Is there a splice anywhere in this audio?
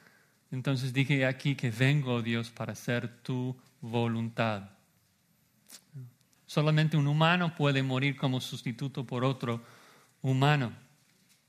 yes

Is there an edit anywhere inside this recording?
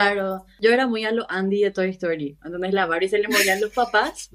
yes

